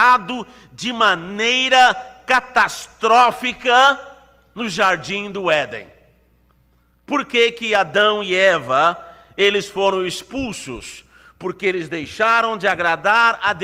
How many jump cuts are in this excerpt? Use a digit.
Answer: 0